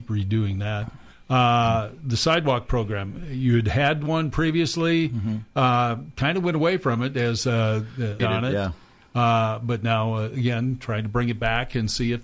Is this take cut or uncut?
cut